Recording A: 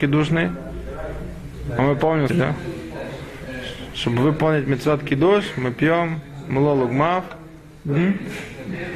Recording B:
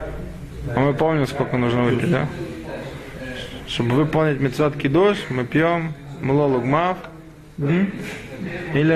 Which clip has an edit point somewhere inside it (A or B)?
A